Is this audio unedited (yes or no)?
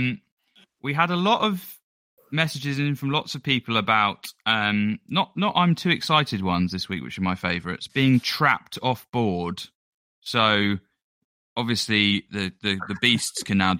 no